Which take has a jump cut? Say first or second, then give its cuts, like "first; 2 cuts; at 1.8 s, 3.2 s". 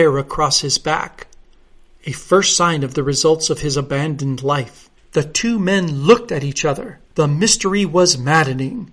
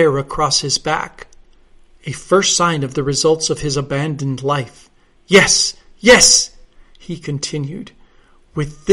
first; 2 cuts; at 5.0 s, 7.1 s